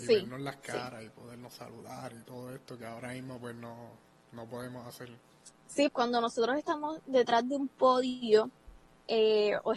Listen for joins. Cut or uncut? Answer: cut